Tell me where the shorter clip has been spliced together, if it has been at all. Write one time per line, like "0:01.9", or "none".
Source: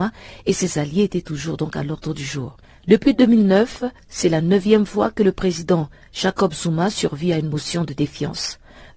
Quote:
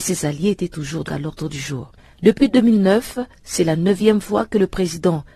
0:01.1